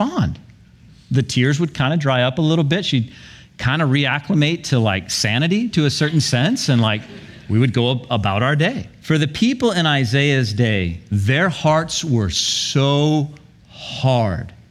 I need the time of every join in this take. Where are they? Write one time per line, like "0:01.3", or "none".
0:09.0